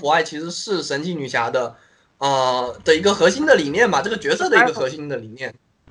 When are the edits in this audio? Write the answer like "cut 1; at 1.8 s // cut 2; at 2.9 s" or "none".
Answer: none